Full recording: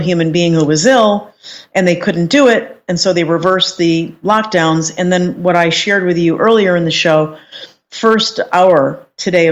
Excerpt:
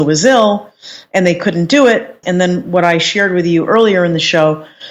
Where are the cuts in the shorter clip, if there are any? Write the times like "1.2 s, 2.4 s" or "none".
2.2 s